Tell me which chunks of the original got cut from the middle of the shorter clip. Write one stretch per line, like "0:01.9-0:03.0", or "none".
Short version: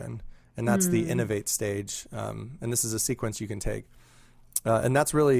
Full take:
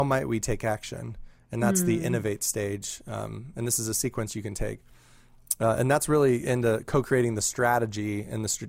none